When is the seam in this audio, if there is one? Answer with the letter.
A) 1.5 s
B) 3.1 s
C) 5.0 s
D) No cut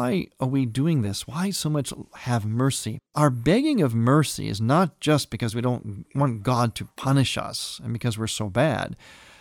B